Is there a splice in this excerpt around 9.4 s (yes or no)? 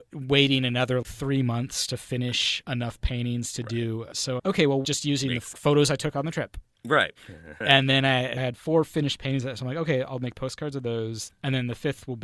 no